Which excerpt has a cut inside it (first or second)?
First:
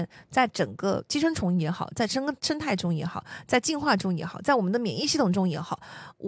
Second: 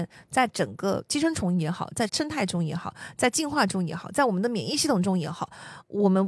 second